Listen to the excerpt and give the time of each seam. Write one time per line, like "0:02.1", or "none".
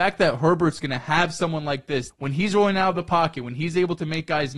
0:02.1

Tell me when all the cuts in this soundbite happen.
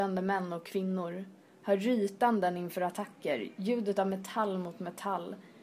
none

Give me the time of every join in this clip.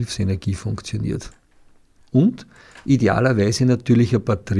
0:02.0

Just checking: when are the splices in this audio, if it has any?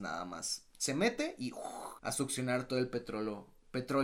0:02.0

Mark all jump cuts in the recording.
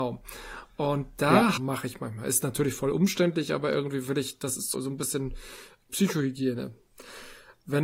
0:01.6
0:04.7

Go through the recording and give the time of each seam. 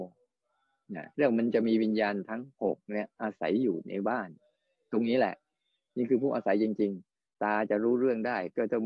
0:01.1

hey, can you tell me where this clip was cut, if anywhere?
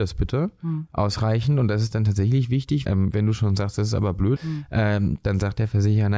0:02.8
0:04.4

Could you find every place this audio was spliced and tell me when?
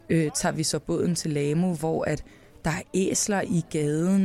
none

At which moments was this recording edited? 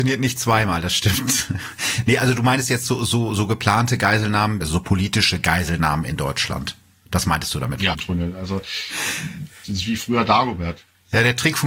0:04.6
0:07.9

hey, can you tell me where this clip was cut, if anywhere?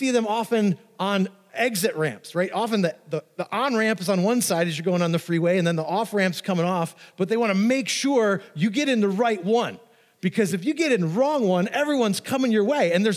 none

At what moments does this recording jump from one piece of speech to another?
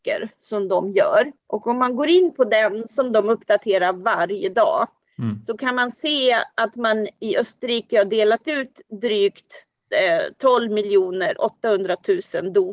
0:01.4

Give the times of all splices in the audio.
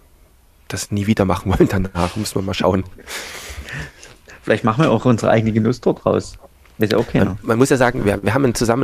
none

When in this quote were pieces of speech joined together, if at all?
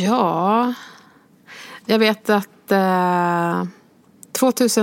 0:01.8

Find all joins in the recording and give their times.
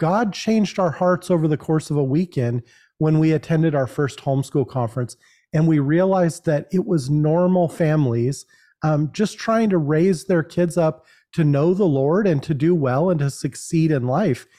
none

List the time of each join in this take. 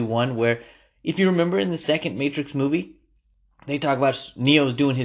none

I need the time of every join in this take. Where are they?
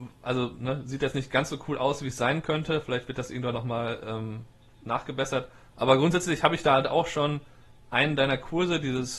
none

